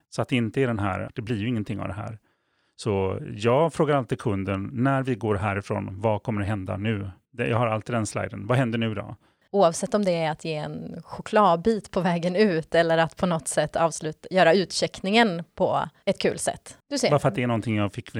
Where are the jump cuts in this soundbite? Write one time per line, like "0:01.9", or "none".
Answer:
0:01.1
0:09.4
0:16.8